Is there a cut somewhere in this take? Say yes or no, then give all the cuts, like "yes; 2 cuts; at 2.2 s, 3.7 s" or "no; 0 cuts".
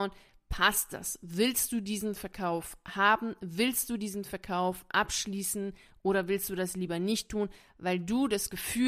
no; 0 cuts